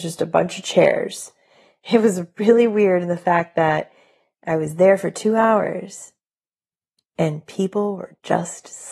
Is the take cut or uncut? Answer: uncut